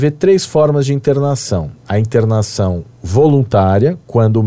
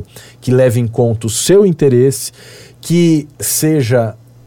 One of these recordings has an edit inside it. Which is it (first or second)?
first